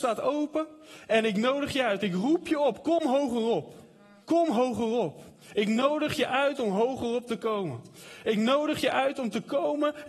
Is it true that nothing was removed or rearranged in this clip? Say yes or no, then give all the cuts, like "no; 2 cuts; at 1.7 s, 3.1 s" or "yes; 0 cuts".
no; 1 cut; at 4.2 s